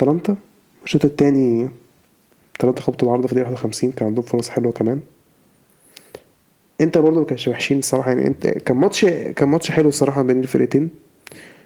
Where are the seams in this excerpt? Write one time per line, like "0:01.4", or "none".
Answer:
none